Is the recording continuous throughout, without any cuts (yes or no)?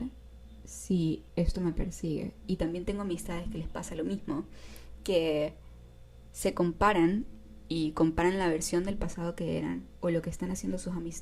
no